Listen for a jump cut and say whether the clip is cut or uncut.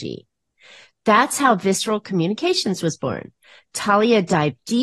uncut